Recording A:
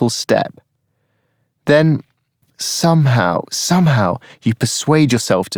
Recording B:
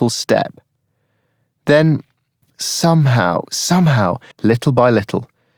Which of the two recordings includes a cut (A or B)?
B